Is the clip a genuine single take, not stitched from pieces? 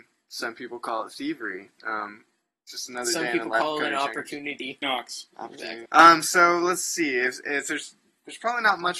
no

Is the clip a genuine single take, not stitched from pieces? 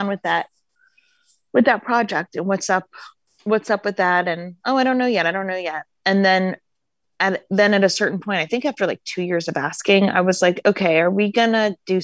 yes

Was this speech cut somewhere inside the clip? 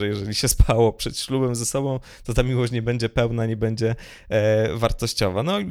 no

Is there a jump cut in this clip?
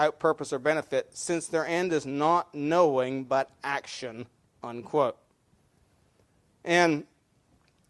no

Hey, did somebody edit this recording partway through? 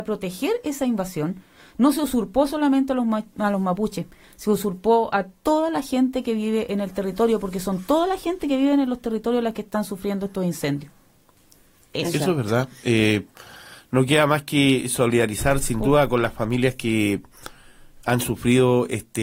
no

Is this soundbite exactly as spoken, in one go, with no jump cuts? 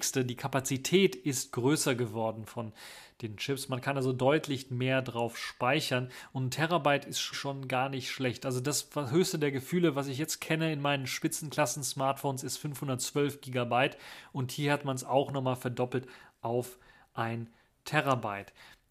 no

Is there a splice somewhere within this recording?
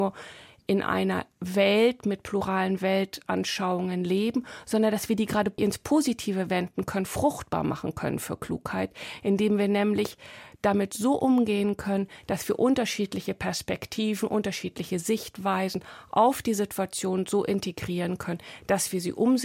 no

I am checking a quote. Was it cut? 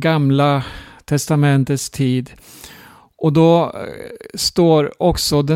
no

